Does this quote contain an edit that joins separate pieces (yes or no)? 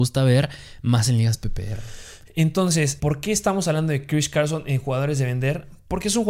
yes